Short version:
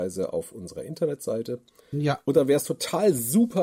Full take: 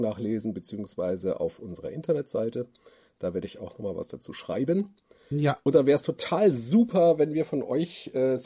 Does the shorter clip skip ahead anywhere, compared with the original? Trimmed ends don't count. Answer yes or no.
yes